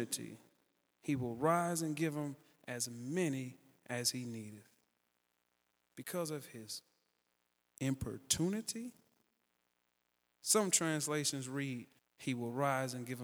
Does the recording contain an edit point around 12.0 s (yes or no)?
yes